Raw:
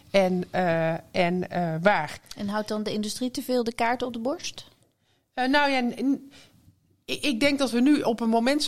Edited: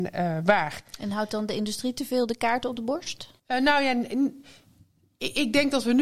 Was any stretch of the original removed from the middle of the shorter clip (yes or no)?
yes